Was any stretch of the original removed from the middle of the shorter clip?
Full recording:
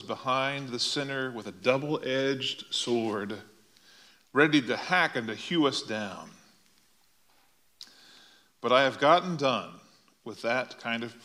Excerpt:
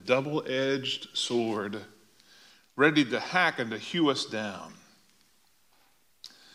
no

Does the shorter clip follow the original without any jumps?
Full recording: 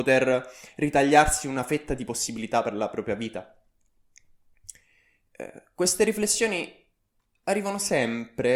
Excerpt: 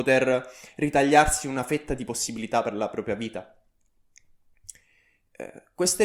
yes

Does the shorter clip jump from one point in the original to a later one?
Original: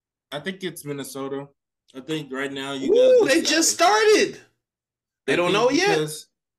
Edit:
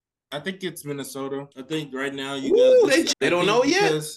yes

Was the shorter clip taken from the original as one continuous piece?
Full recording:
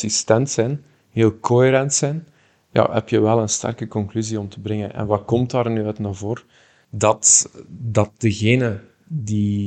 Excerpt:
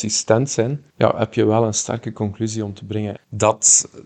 no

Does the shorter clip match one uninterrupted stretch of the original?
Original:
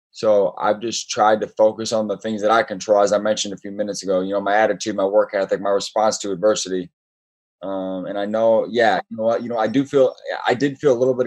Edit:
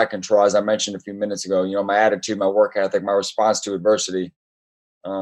yes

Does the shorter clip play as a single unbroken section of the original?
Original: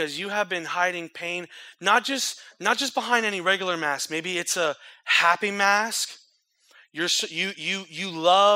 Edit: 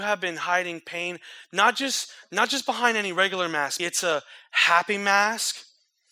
no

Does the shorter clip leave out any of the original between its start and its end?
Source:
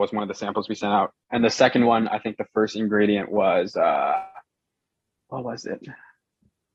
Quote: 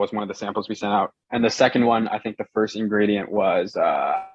no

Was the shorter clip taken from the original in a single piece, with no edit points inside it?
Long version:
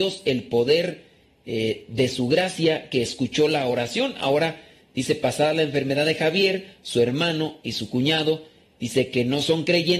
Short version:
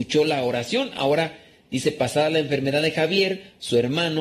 yes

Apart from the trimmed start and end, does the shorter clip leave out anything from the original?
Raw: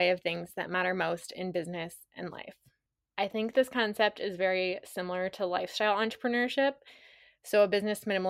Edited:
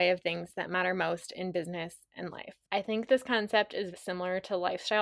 yes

